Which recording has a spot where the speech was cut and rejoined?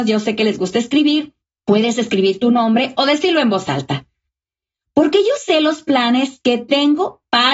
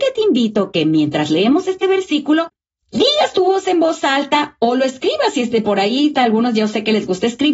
second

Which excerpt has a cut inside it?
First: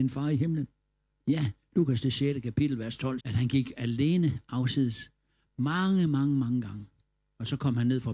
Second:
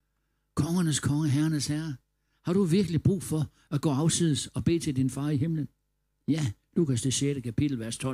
first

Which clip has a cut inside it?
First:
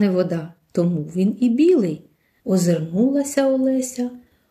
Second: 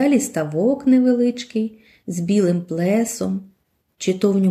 first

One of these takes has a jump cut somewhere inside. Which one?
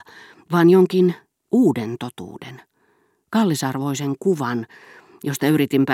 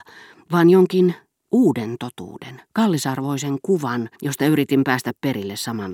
second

